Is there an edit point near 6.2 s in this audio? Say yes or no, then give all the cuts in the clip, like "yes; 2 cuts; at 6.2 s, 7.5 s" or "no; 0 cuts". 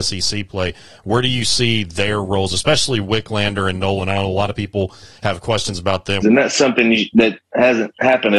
yes; 1 cut; at 6.2 s